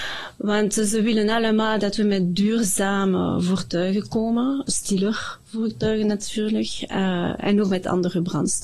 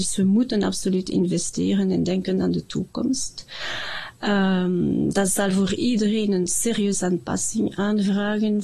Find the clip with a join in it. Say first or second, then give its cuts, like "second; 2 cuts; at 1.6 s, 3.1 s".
first; 1 cut; at 4.7 s